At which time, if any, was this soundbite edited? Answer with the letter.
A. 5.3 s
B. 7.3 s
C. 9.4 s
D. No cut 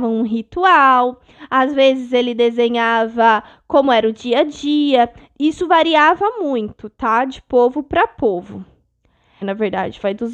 C